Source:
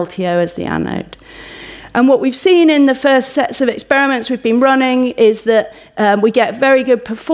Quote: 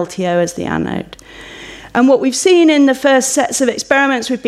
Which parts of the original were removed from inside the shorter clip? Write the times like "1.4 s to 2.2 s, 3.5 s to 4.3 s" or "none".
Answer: none

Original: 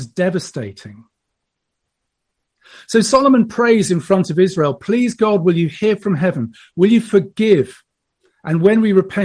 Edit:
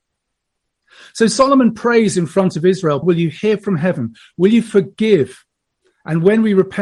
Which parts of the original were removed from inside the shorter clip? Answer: 4.8 s to 5.4 s

